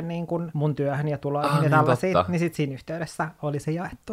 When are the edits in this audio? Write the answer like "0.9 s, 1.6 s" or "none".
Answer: none